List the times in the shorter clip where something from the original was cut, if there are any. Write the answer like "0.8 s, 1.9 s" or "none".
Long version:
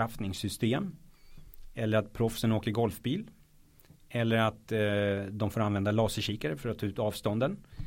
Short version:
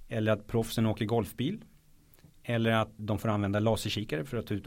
3.0 s